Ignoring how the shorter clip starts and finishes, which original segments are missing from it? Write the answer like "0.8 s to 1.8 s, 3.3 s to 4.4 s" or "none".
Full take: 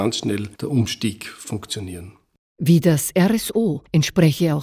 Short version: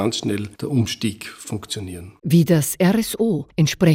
2.2 s to 2.5 s